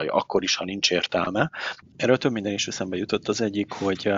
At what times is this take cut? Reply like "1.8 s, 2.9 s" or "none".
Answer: 1.8 s